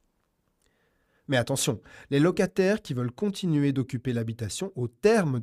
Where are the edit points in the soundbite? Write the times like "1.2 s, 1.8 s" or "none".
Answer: none